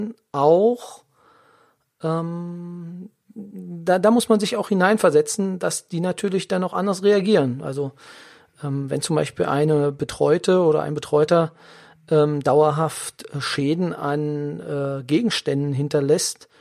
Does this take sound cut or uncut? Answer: uncut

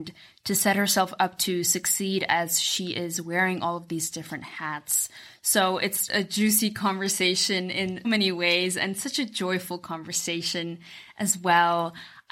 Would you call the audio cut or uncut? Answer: cut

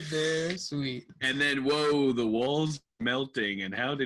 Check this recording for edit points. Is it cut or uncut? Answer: uncut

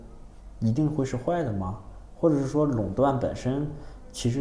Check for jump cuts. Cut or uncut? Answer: uncut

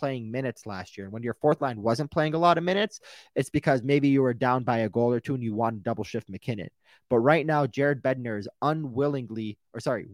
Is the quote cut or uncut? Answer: uncut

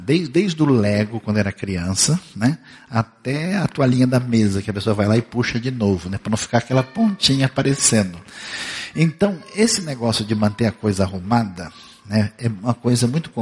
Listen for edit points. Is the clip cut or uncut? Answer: uncut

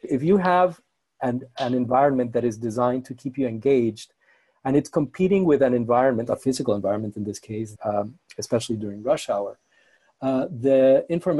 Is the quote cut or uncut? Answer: cut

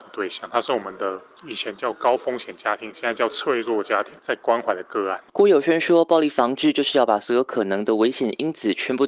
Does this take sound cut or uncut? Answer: cut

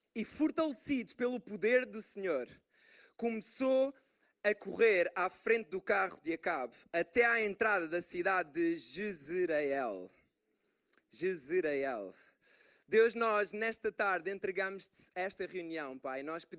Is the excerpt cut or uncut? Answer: uncut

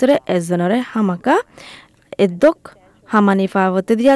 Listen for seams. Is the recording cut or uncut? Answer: uncut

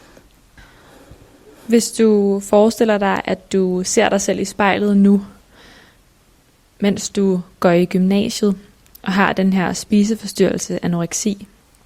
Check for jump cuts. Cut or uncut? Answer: uncut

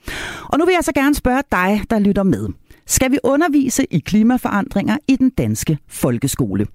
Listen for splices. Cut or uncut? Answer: uncut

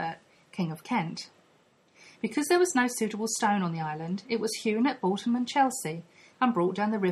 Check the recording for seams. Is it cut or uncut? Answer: uncut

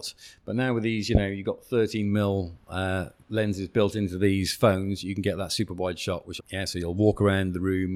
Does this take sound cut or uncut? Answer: cut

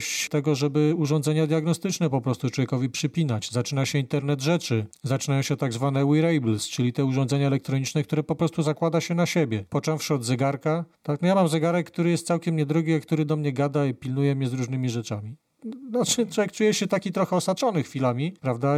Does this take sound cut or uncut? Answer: uncut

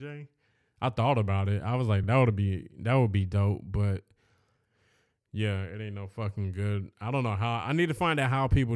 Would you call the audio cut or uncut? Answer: uncut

